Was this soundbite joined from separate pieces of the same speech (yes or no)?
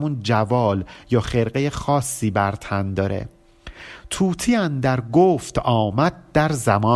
no